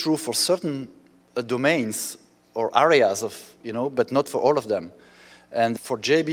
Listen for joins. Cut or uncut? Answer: uncut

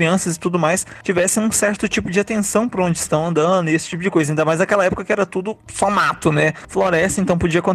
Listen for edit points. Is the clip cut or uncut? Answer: uncut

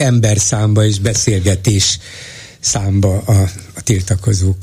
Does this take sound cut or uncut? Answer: uncut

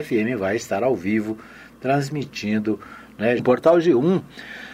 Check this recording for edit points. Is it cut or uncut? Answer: cut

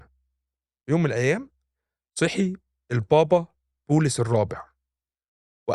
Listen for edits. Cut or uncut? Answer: uncut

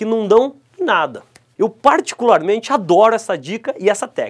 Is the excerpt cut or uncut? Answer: cut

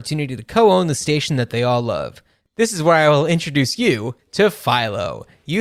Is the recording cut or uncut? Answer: cut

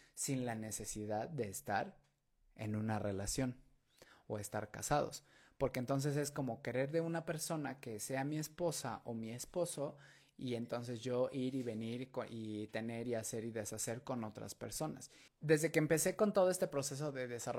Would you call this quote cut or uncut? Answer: cut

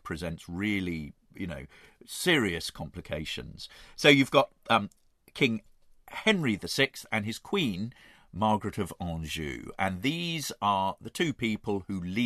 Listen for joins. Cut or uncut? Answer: uncut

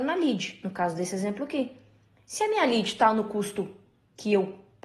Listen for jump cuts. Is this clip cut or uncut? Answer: uncut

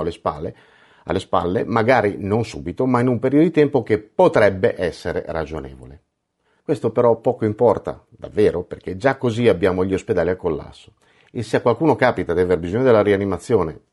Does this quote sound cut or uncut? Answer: cut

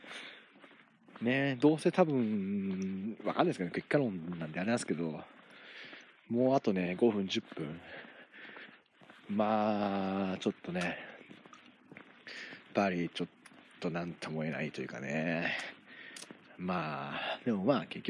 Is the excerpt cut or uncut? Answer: cut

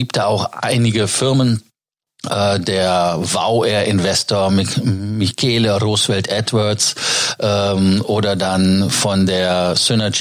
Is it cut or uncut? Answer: uncut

